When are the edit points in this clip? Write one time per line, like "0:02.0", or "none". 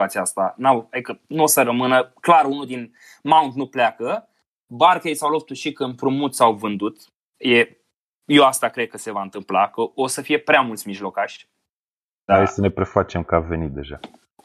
0:12.3